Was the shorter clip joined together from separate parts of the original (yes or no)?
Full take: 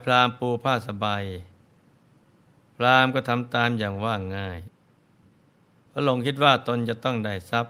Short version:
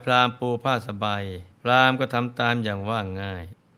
yes